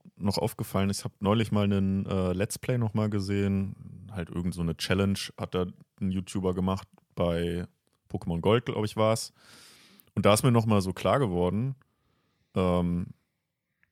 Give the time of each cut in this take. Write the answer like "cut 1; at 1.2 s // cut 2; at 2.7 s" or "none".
none